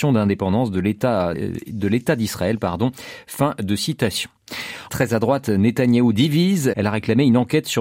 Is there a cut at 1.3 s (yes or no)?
yes